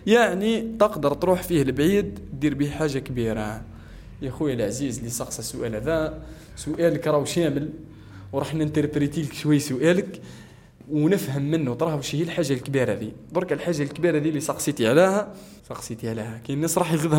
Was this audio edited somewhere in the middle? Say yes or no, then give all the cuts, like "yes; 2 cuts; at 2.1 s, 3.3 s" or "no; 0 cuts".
yes; 1 cut; at 15.6 s